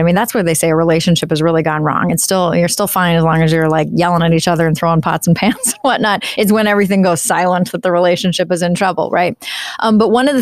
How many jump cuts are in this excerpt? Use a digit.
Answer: 0